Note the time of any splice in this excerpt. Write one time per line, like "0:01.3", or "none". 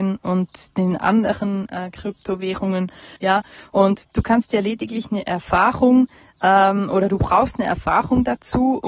0:03.2